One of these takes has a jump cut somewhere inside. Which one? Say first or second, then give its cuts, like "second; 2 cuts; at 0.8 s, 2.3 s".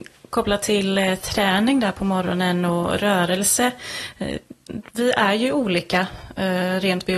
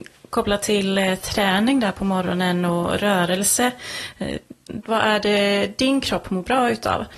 second; 1 cut; at 4.8 s